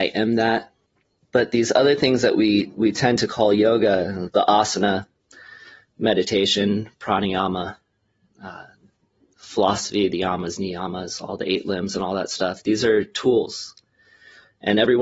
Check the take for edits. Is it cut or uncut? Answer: uncut